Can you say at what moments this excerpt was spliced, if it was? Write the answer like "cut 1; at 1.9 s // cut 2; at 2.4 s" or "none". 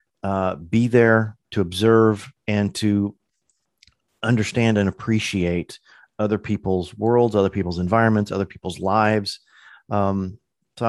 none